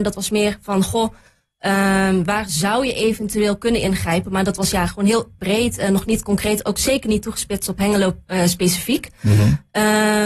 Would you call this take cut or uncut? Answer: cut